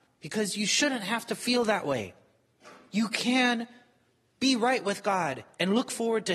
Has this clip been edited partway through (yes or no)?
no